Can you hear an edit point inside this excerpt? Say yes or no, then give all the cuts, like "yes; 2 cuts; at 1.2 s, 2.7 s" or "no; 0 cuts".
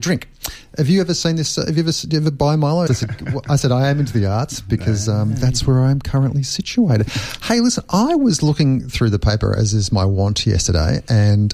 yes; 1 cut; at 2.9 s